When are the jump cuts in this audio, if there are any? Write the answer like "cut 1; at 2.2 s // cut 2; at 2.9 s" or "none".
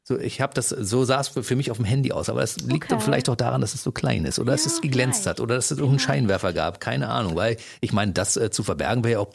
none